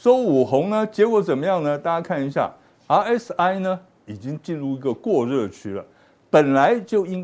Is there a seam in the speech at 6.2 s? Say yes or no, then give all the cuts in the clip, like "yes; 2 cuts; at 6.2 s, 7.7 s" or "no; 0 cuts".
no; 0 cuts